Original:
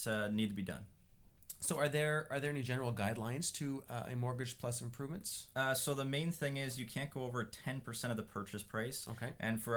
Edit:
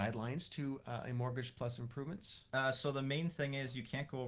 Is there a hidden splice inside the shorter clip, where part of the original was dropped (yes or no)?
no